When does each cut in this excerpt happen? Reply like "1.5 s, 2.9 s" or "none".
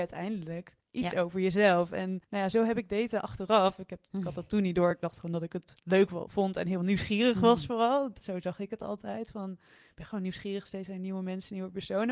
none